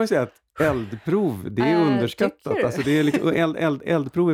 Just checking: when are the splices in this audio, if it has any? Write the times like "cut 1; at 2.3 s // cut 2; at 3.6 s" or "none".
none